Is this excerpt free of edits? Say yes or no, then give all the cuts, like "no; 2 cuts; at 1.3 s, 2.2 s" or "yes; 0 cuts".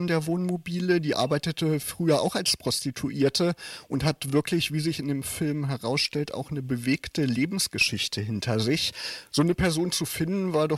yes; 0 cuts